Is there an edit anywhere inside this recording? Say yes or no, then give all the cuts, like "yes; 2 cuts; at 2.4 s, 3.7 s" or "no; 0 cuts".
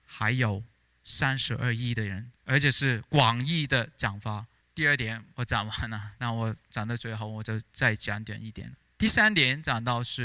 yes; 2 cuts; at 2.4 s, 4.6 s